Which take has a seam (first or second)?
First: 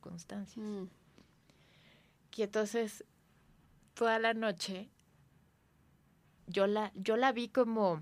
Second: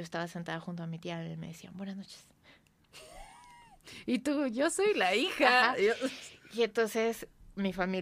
first